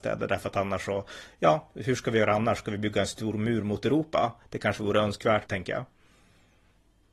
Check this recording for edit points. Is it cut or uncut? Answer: cut